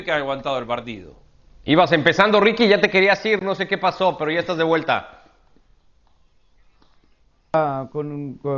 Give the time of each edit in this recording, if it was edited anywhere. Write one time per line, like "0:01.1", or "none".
none